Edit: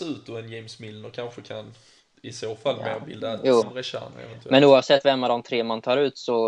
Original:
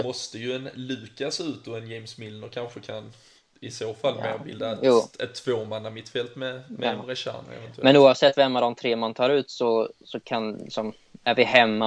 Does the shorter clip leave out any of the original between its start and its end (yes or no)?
yes